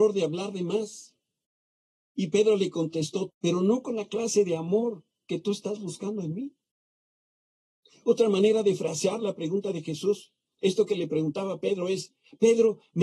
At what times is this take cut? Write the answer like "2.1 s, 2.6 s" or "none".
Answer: 3.3 s